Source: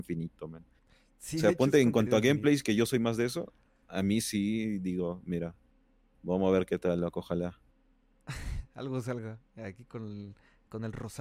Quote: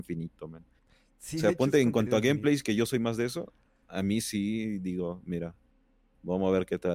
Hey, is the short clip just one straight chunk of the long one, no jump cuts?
yes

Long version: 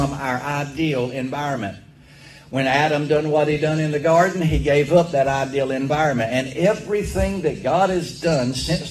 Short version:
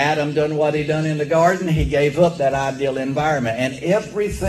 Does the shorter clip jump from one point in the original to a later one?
no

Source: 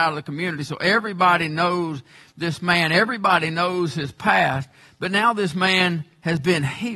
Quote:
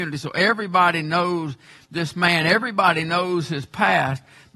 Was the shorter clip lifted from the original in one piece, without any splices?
yes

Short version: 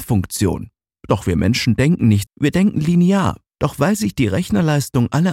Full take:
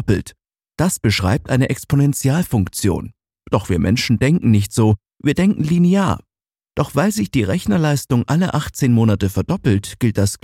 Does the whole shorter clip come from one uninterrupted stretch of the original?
no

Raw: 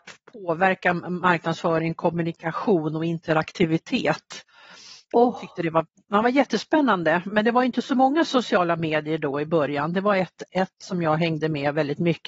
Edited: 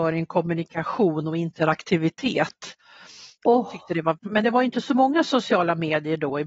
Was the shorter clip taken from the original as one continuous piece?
no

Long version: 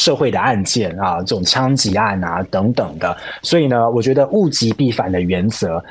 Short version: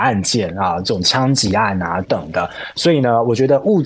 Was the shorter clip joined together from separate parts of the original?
yes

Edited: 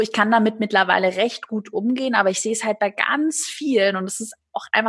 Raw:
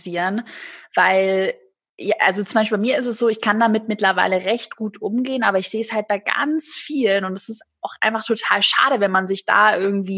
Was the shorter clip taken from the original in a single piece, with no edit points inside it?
yes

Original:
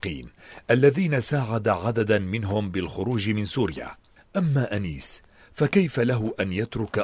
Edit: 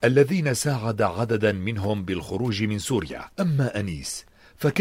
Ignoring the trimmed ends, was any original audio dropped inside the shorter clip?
yes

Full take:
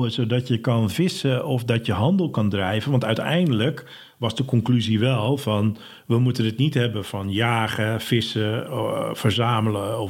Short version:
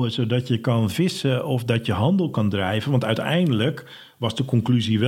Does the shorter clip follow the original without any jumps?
yes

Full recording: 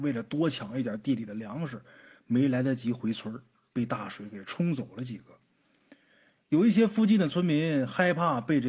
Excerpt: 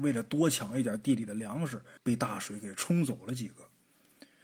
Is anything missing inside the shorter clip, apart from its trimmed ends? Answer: yes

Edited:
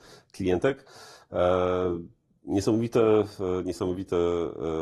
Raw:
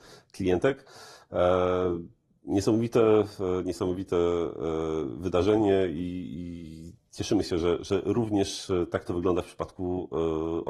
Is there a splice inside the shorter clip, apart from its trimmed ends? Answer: no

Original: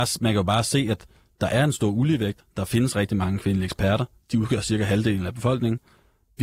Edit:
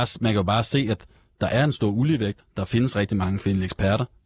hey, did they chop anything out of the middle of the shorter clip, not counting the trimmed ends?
no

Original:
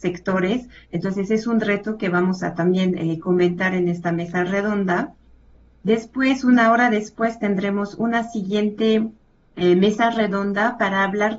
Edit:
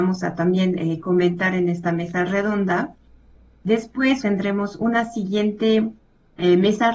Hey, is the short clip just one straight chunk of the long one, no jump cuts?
no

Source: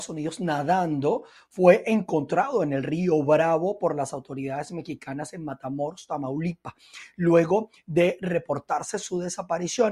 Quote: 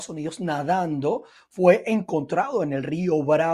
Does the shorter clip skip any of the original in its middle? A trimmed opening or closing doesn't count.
no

